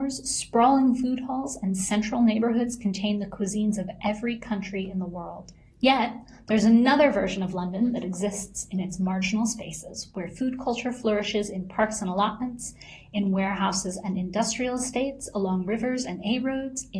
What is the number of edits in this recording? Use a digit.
0